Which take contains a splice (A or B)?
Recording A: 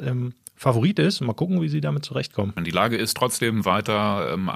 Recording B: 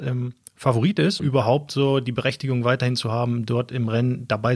B